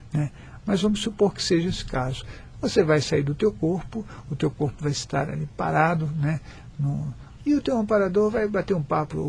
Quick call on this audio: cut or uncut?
cut